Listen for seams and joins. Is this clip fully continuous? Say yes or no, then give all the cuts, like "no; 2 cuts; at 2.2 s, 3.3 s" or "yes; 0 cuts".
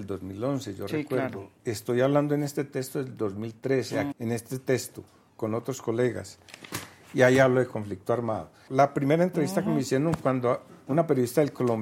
no; 3 cuts; at 4.1 s, 8.7 s, 10.7 s